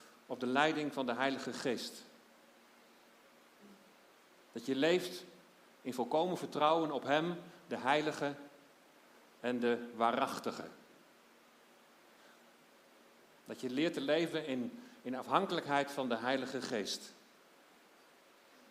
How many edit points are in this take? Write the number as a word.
zero